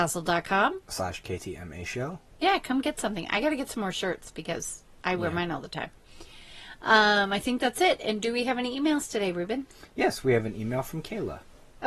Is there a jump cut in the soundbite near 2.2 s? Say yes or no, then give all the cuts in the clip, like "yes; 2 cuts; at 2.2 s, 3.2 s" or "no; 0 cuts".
no; 0 cuts